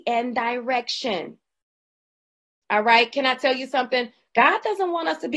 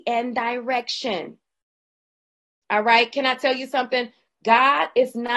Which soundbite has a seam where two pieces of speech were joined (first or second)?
first